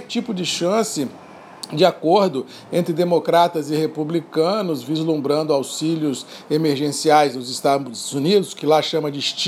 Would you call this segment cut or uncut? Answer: uncut